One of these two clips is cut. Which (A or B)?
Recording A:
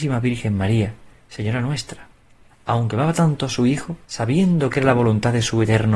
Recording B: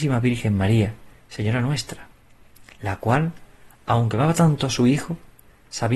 A